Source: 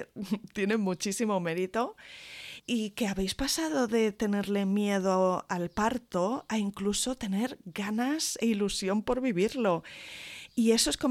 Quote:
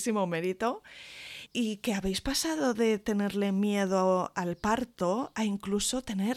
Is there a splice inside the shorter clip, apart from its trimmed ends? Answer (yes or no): no